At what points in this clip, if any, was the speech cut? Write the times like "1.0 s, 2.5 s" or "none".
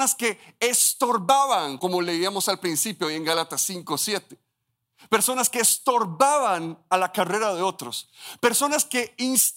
1.8 s